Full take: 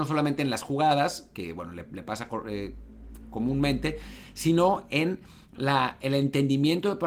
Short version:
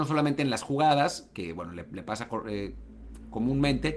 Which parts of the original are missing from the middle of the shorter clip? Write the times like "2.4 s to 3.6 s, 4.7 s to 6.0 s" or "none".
none